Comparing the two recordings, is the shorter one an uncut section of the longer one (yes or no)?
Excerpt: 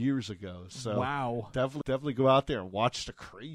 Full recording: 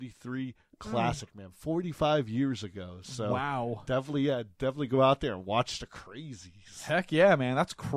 no